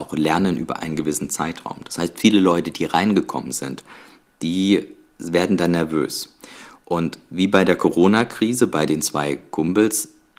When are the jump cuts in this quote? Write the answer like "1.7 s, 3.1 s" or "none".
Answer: 4.3 s